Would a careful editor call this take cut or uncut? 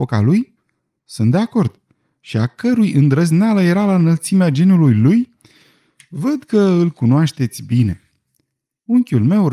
uncut